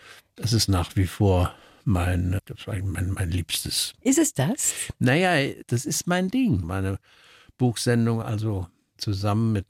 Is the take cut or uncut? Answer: cut